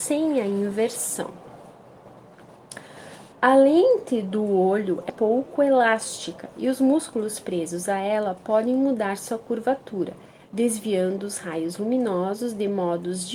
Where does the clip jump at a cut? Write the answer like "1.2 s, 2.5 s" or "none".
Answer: 3.3 s, 5.1 s